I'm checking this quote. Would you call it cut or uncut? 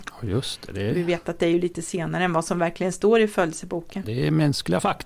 cut